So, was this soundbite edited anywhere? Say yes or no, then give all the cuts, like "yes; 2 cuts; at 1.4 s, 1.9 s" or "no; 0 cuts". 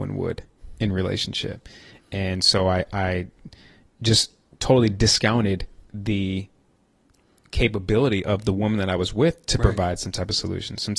no; 0 cuts